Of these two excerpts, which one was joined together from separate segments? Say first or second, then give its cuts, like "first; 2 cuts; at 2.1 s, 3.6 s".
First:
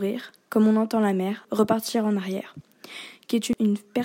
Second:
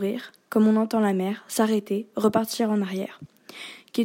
first; 1 cut; at 1.4 s